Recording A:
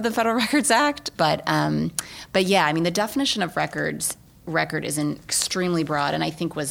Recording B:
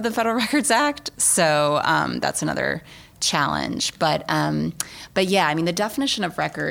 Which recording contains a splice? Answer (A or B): A